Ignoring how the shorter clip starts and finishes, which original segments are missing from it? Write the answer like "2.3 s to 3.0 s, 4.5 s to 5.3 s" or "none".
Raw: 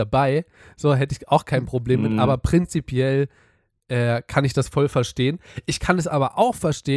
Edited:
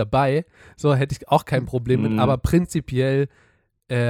none

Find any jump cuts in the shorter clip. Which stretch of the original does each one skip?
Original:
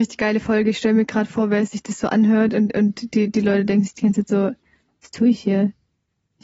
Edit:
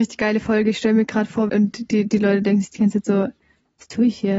1.5 s to 2.7 s

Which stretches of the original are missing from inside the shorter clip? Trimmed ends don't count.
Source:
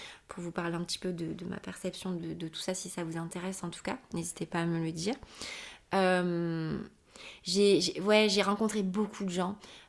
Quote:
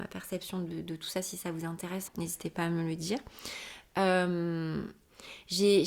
3.6 s to 4.0 s

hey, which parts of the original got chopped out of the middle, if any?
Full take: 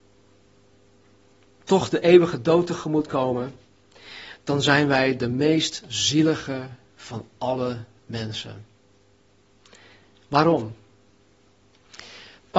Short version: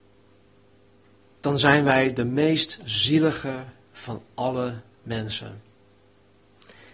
1.4 s to 4.4 s

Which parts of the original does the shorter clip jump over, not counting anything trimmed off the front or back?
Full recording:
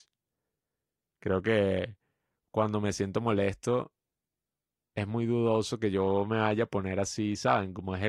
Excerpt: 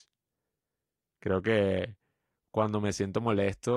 none

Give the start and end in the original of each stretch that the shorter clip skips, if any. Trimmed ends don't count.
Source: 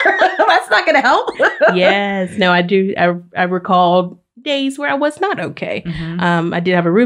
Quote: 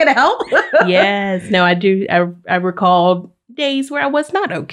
none

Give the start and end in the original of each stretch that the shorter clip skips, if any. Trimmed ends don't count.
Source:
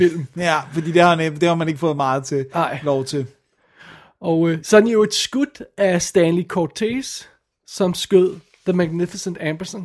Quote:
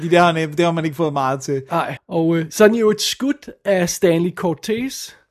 2.8 s to 4.1 s

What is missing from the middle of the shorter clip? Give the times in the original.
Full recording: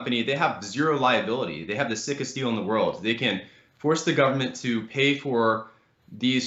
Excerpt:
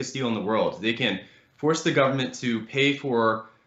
none

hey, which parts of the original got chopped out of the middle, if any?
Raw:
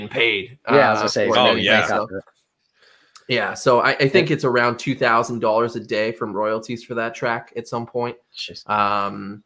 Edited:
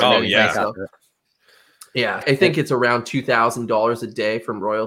3.5 s to 3.9 s

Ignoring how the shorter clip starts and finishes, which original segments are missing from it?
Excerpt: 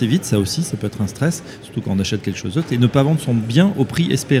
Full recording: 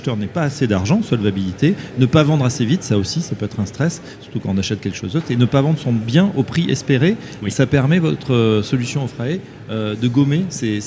none

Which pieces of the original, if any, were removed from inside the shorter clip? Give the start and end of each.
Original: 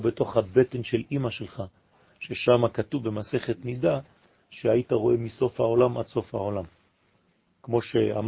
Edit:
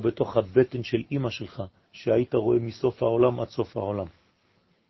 1.8 s to 4.4 s

